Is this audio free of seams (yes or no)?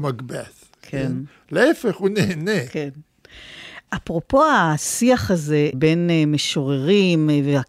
yes